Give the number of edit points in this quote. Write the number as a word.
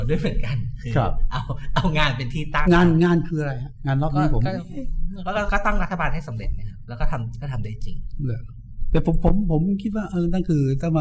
two